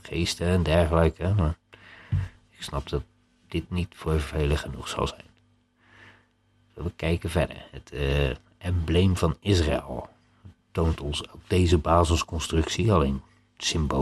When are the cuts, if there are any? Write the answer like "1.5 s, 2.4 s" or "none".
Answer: none